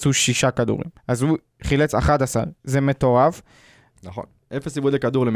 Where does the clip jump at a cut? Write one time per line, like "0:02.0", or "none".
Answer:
0:01.0
0:03.9